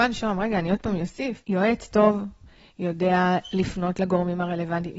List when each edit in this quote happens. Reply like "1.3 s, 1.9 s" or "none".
1.4 s